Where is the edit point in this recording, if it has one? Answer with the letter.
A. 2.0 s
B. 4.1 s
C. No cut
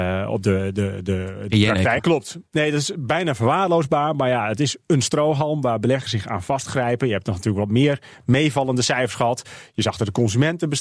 A